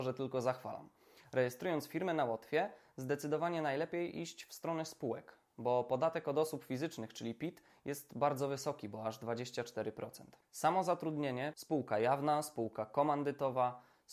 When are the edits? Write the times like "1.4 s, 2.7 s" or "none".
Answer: 10.4 s, 11.5 s